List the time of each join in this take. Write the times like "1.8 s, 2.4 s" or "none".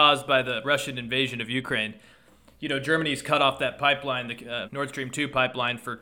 4.6 s